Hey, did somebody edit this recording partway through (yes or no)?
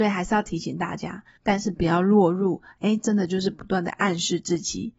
yes